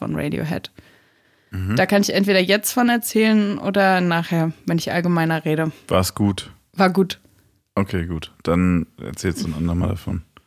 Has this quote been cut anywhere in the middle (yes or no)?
no